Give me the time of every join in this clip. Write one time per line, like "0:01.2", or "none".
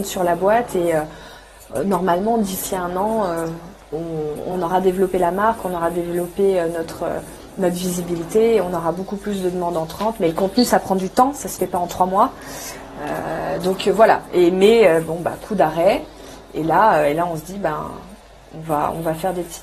none